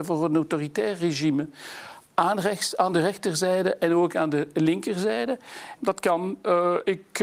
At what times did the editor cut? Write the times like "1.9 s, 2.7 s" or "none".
5.8 s